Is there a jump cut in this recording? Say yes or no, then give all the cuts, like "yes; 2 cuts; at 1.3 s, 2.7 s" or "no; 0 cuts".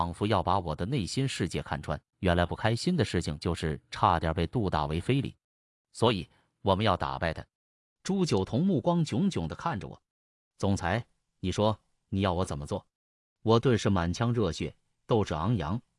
yes; 1 cut; at 2.1 s